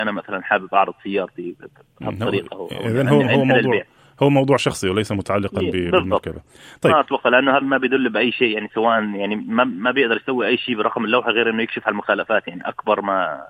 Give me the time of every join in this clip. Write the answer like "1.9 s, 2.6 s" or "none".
7.6 s